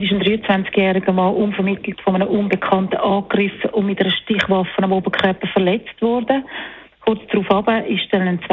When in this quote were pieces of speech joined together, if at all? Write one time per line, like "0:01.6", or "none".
0:06.9